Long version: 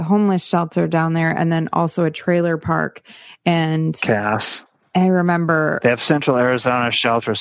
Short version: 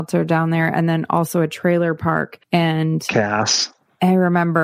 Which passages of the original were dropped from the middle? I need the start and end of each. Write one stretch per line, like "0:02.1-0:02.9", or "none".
0:03.1-0:03.4